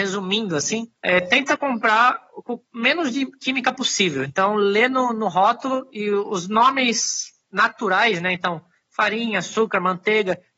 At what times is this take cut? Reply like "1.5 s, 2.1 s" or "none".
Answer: 1.0 s